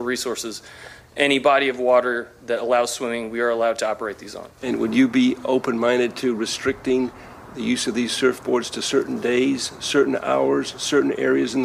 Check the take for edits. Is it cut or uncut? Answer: cut